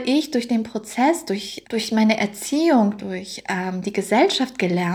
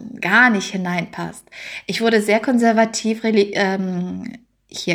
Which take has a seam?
first; 2 cuts; at 1.6 s, 3.0 s

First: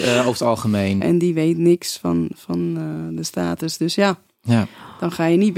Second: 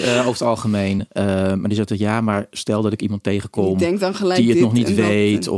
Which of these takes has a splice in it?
first; 1 cut; at 1.0 s

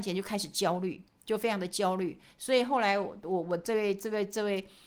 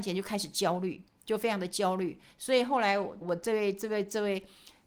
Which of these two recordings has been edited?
second; 1 cut; at 3.2 s

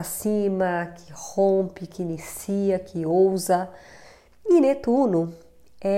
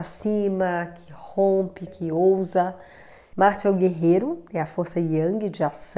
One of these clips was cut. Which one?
second; 2 cuts; at 1.9 s, 3.3 s

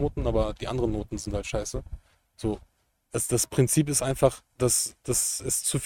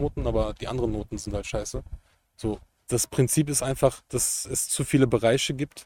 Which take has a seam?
second; 2 cuts; at 2.9 s, 4.1 s

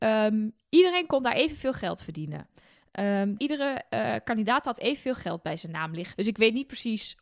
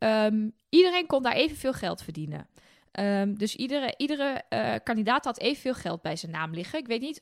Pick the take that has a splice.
first; 2 cuts; at 3.4 s, 6.1 s

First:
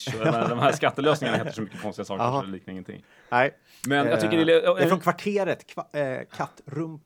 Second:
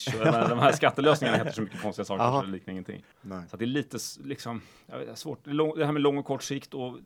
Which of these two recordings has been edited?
second; 1 cut; at 3.1 s

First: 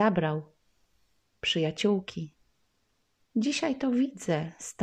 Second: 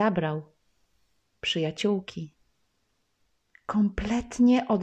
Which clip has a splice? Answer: first; 1 cut; at 3.3 s

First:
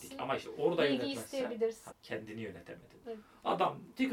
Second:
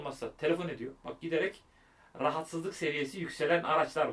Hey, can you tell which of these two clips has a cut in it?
first; 2 cuts; at 1.9 s, 3.0 s

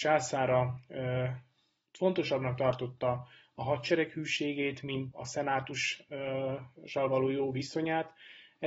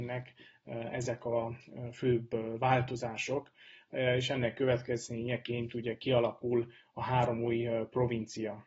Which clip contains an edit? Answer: first; 1 cut; at 5.1 s

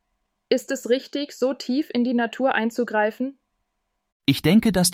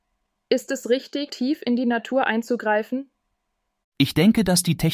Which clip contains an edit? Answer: second; 1 cut; at 1.3 s

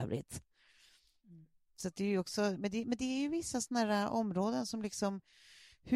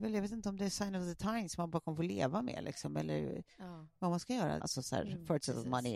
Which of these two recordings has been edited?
second; 1 cut; at 4.6 s

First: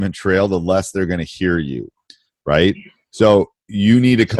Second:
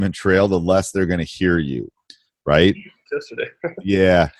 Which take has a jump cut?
second; 1 cut; at 3.1 s

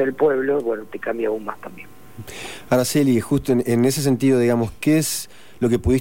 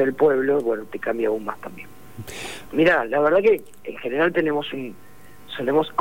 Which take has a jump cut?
second; 1 cut; at 2.7 s

